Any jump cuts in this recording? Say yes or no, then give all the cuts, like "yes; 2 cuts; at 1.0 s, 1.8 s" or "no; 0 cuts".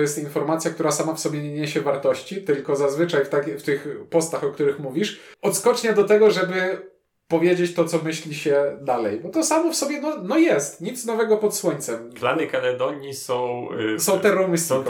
yes; 1 cut; at 5.3 s